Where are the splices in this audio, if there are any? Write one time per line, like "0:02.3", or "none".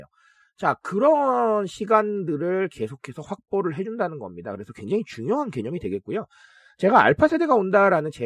none